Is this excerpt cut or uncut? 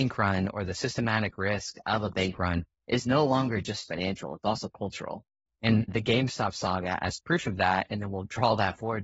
cut